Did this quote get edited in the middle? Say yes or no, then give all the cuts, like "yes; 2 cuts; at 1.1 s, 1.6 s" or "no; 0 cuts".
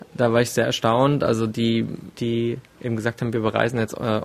yes; 1 cut; at 2.1 s